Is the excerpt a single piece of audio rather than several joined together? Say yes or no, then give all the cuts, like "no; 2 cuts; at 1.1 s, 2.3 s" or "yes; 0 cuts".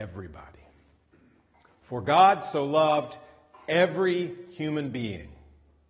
yes; 0 cuts